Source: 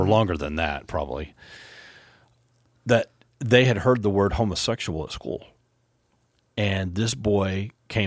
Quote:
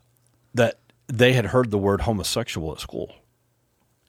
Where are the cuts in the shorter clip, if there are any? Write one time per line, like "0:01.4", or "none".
none

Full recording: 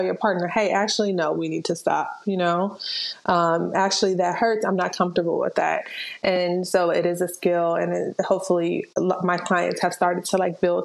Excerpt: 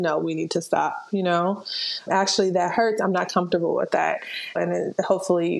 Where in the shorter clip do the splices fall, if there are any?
0:02.1
0:04.5

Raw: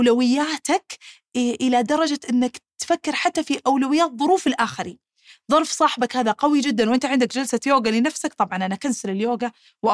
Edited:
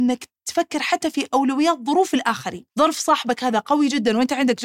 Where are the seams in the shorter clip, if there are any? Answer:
0:02.7

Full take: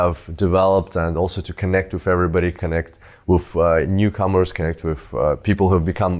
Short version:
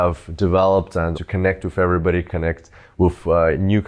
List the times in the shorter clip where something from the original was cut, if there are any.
0:01.1

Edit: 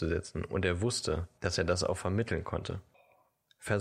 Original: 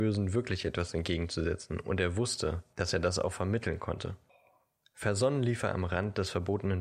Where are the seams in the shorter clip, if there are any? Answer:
none

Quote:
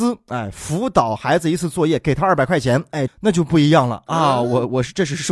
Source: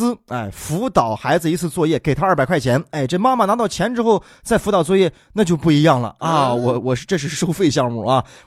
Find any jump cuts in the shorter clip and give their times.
0:03.1

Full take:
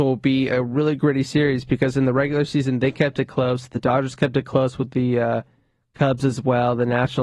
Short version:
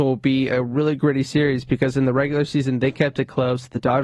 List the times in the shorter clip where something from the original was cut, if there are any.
none

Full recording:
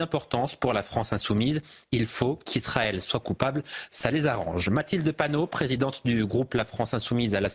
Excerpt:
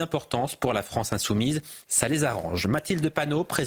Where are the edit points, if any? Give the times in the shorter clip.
0:01.9

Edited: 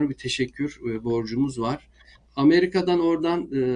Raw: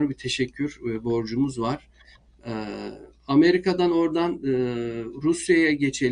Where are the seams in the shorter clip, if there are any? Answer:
0:02.3

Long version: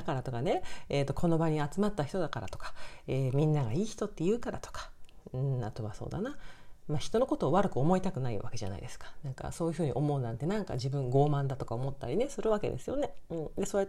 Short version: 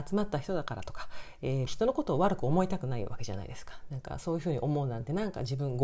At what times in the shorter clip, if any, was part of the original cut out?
0:01.7

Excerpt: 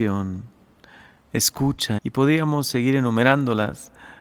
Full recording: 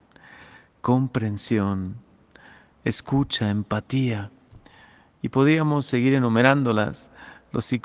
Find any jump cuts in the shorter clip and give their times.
0:02.0

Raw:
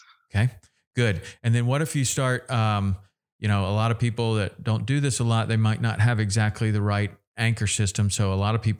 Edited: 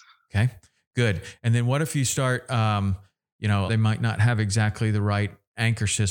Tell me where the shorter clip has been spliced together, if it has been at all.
0:03.7

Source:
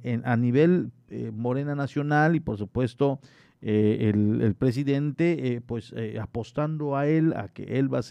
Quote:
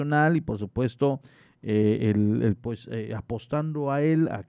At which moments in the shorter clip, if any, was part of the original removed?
0:02.6

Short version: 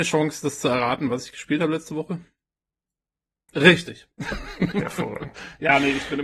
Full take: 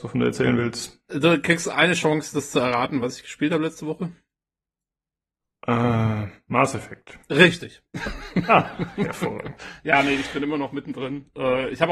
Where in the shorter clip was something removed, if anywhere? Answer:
0:03.5
0:04.7

